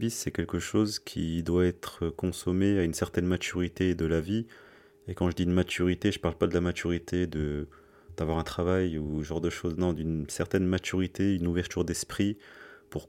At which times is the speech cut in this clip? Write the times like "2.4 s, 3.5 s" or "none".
4.0 s